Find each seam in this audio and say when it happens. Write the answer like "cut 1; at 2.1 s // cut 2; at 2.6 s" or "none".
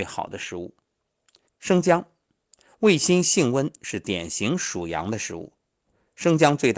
cut 1; at 1.5 s // cut 2; at 3.8 s